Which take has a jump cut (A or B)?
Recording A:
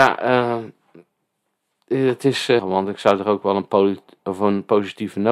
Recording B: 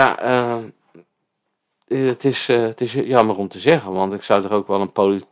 A